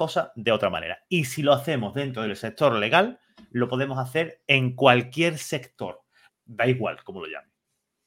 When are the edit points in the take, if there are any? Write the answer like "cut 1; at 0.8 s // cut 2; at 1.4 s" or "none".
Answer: cut 1; at 6.3 s